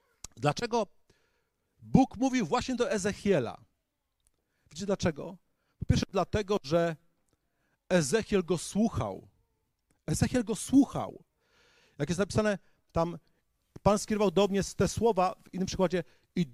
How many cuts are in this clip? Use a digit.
0